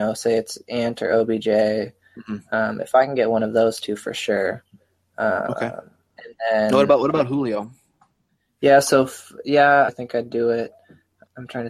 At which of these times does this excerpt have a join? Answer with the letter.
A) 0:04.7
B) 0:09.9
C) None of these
B